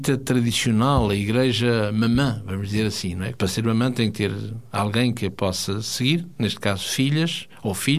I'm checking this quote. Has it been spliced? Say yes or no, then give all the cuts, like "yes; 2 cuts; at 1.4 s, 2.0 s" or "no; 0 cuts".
yes; 1 cut; at 3.3 s